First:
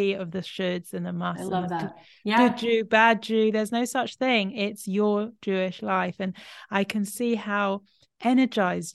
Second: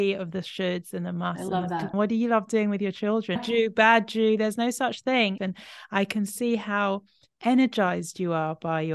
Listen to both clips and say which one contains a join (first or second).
second